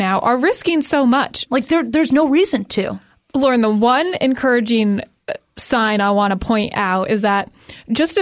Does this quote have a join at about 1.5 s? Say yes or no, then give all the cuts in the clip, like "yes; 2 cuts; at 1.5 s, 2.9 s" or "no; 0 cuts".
yes; 1 cut; at 1.5 s